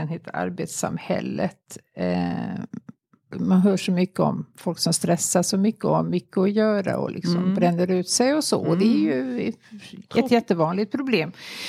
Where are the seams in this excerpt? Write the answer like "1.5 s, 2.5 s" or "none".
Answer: 3.3 s